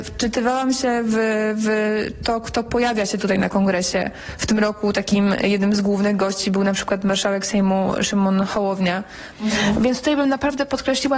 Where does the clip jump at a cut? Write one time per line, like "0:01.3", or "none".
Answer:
0:09.3